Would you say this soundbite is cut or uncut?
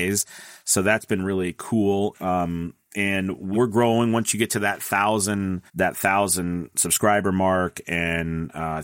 cut